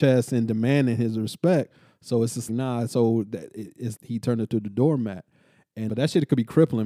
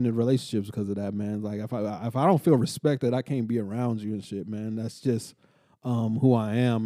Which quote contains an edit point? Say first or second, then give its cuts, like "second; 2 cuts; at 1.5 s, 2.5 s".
first; 3 cuts; at 2.5 s, 4.0 s, 5.9 s